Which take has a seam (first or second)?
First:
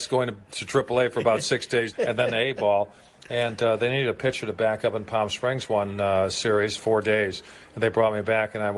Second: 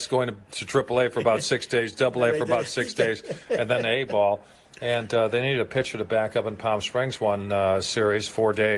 first